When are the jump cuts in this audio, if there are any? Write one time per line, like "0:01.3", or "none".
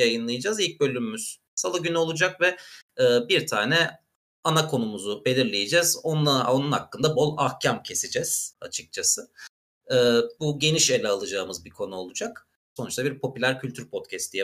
0:07.1
0:12.8